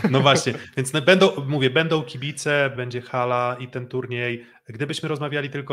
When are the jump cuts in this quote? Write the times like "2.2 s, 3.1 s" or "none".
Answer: 2.8 s